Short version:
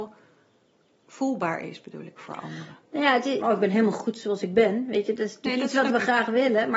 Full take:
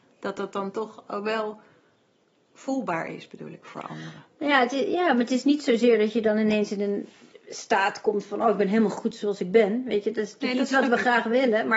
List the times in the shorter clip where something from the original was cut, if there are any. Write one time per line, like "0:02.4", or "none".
0:03.4